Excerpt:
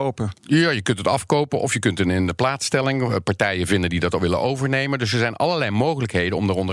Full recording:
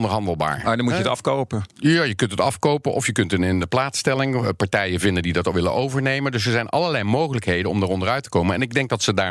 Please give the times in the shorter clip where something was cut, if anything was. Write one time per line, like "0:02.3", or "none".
none